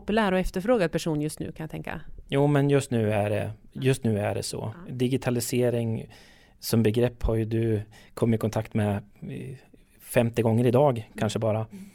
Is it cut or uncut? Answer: uncut